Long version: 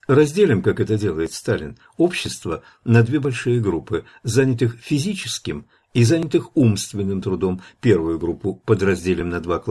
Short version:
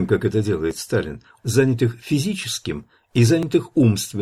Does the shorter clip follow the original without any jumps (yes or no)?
no